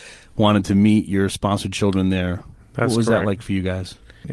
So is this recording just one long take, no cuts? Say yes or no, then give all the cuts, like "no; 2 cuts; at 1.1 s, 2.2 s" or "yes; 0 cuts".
yes; 0 cuts